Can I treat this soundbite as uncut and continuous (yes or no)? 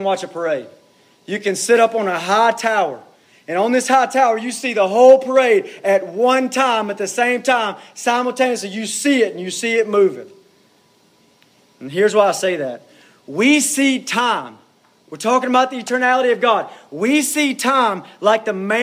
yes